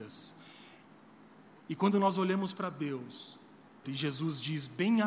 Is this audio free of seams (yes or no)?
no